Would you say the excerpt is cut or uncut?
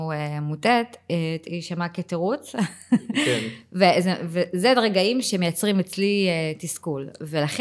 uncut